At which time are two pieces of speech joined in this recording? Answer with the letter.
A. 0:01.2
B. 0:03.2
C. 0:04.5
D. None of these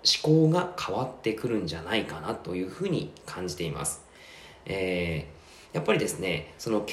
D